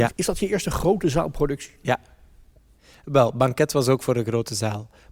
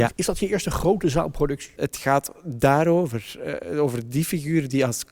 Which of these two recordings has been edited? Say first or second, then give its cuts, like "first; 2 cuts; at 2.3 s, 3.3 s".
second; 1 cut; at 1.8 s